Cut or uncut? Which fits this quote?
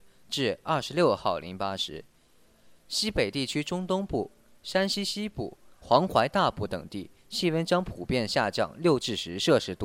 cut